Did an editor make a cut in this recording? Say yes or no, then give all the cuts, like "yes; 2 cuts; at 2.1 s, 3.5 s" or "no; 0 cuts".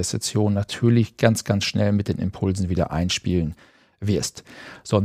no; 0 cuts